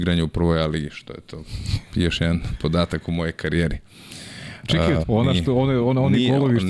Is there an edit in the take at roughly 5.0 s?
yes; 1 cut; at 5.0 s

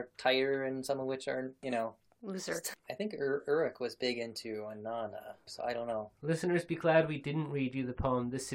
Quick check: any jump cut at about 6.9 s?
no; 3 cuts; at 1.6 s, 2.7 s, 5.5 s

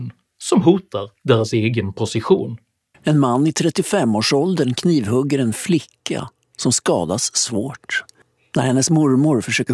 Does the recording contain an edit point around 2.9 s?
yes; 1 cut; at 2.9 s

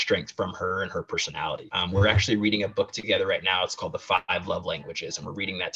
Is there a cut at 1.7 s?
yes; 1 cut; at 1.7 s

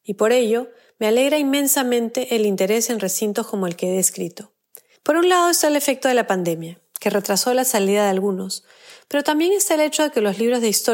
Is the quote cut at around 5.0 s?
yes; 1 cut; at 5.0 s

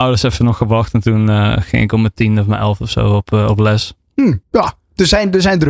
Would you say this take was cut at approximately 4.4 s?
yes; 1 cut; at 4.4 s

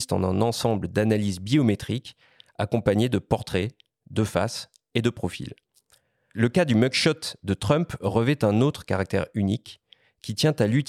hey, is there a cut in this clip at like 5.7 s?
no; 0 cuts

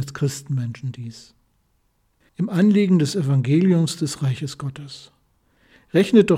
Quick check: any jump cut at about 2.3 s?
yes; 1 cut; at 2.3 s

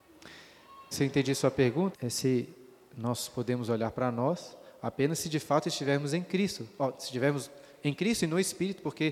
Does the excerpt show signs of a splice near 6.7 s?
no; 2 cuts; at 0.9 s, 1.9 s

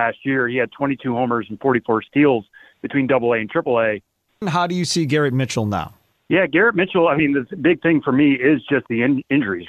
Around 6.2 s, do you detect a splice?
no; 1 cut; at 4.4 s

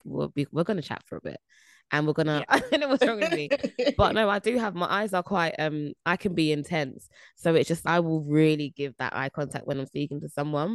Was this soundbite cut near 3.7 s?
no; 2 cuts; at 2.5 s, 7.8 s

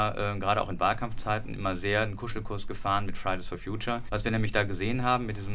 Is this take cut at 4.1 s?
yes; 1 cut; at 4.1 s

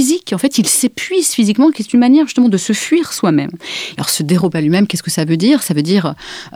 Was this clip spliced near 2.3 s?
no; 1 cut; at 3.9 s

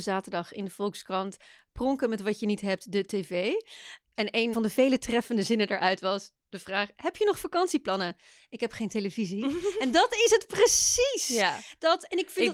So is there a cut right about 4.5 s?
yes; 1 cut; at 4.5 s

